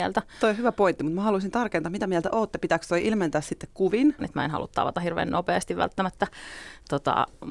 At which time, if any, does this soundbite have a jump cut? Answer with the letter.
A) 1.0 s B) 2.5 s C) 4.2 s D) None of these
C